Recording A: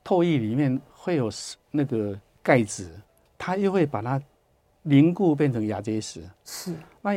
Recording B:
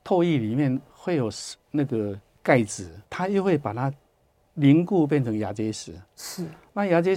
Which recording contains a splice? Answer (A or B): B